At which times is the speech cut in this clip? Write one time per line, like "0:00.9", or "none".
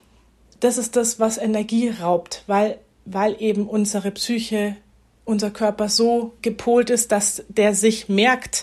0:06.4